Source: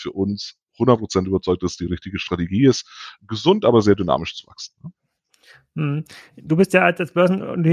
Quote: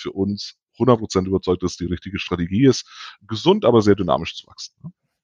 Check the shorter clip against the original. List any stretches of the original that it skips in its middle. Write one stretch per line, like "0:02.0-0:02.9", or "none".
none